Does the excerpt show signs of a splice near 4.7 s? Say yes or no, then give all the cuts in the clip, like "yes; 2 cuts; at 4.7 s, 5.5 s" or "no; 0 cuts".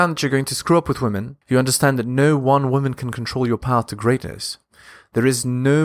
no; 1 cut; at 1.4 s